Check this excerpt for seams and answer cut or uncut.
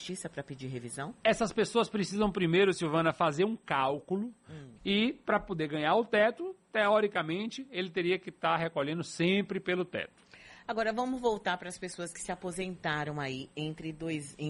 cut